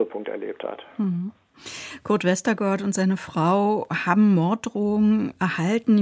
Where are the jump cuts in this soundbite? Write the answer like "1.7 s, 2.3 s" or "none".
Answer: none

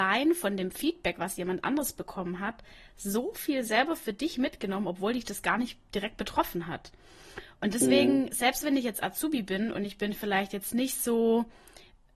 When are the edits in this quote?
none

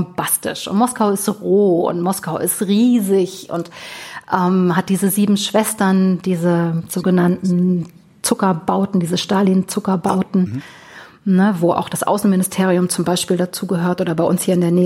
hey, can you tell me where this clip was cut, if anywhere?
none

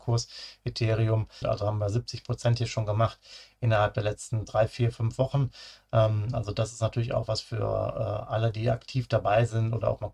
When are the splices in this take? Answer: 1.4 s

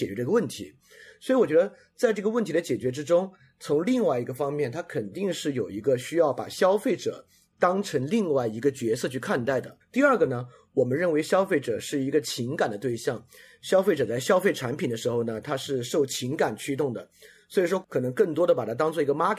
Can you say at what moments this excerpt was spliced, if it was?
9.8 s, 17.8 s

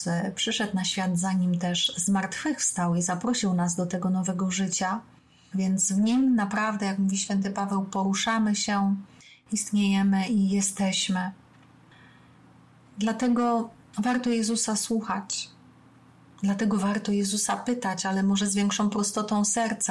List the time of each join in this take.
5.5 s

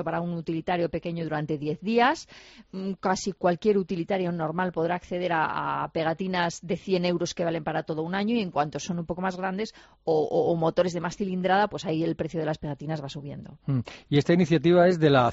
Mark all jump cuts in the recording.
none

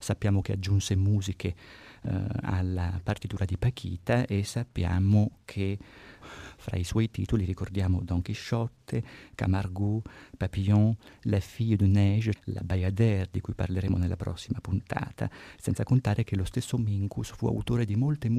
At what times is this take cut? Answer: 6.2 s, 12.4 s

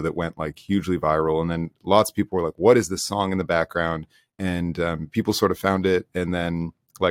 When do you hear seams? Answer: none

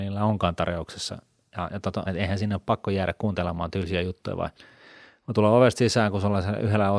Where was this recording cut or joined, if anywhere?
2.1 s

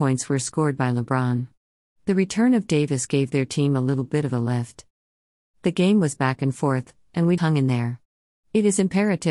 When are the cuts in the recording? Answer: 7.4 s

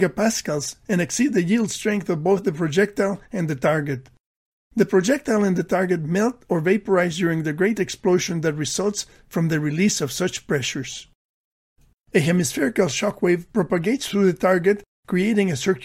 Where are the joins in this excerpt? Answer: 11.9 s

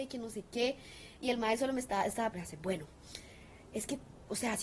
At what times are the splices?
2.3 s

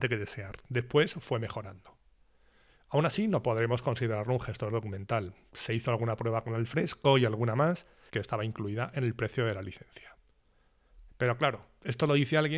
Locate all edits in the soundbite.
8.1 s, 11.1 s

